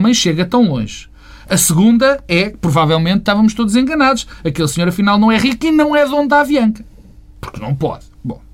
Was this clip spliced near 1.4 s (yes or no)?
no